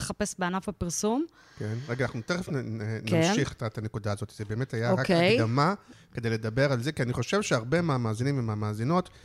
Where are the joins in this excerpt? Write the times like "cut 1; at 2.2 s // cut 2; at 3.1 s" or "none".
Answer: none